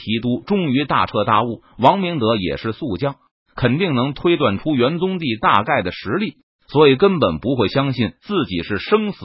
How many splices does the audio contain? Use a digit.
0